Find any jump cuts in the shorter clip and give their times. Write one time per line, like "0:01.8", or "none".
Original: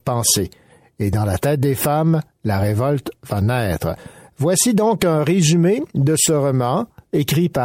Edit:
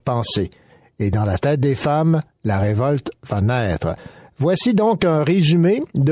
none